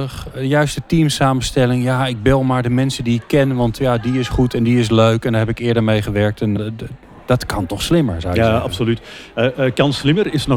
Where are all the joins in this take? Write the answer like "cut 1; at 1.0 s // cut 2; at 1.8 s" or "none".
cut 1; at 6.6 s